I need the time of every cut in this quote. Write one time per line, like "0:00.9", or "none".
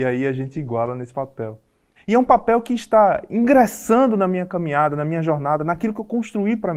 0:02.0